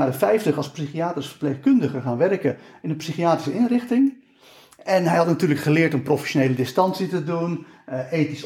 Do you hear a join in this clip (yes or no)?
no